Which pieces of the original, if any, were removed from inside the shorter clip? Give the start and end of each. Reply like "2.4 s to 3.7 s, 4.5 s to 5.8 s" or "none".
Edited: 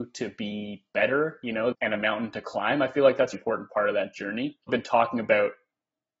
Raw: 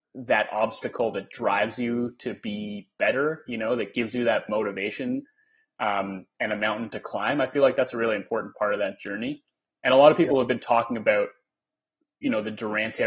3.8 s to 6.3 s, 7.9 s to 8.2 s, 9.5 s to 10.5 s